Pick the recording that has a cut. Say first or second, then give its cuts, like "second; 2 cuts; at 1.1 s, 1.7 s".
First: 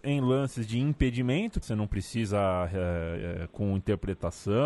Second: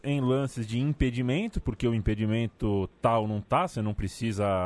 first; 2 cuts; at 1.6 s, 3.5 s